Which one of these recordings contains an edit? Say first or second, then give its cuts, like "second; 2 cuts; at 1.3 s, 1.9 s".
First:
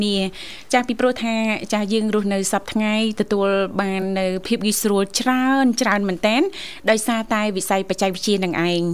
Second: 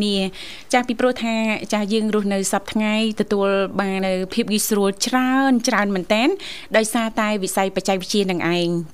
second; 1 cut; at 4.0 s